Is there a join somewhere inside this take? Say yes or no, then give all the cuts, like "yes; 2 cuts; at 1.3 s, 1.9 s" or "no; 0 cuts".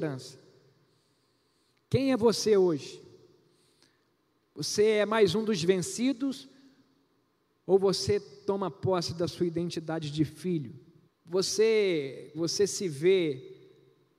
yes; 2 cuts; at 11.0 s, 12.3 s